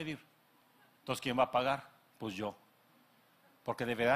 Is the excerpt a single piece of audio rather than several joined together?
no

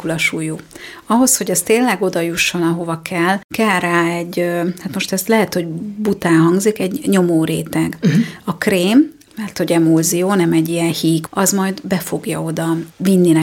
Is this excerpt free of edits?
no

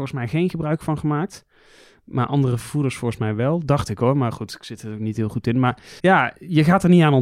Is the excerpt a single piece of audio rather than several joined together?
no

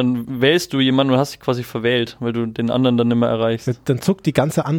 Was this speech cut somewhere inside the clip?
no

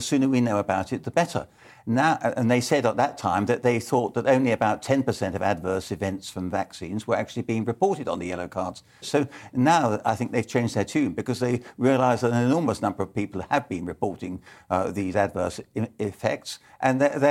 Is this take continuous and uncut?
no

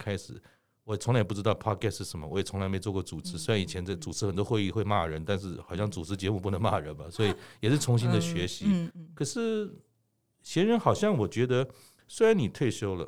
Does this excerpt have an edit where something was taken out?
yes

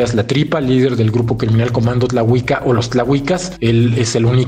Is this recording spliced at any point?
no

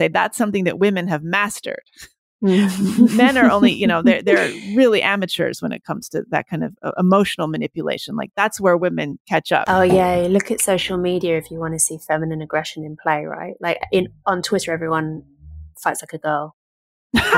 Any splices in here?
no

